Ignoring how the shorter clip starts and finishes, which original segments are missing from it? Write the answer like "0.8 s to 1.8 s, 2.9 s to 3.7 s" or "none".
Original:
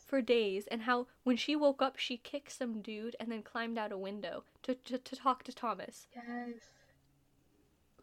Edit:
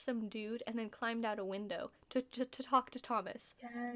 none